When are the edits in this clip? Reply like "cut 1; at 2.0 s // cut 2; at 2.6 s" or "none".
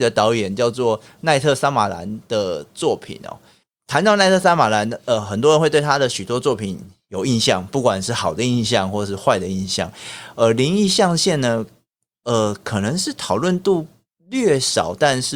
none